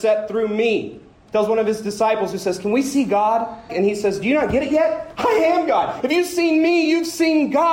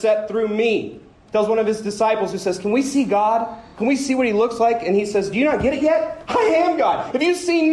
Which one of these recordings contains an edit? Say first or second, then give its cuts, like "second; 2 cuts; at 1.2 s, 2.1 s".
first; 1 cut; at 3.7 s